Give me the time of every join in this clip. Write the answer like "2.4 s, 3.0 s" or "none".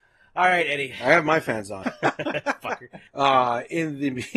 1.8 s, 3.1 s

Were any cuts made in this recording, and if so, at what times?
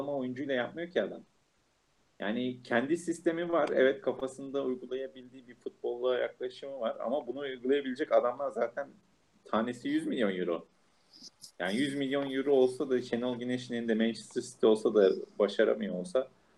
none

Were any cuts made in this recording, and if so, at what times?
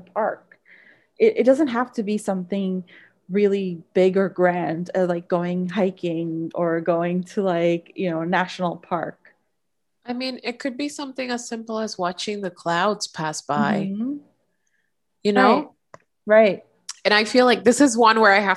none

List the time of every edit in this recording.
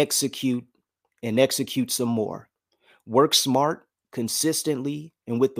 none

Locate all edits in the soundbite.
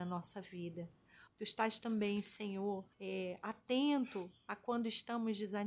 1.3 s, 2.9 s

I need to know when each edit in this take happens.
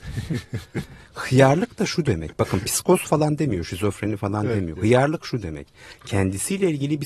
none

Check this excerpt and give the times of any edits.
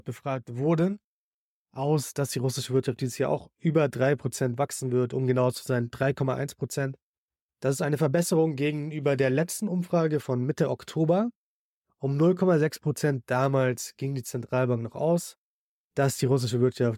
none

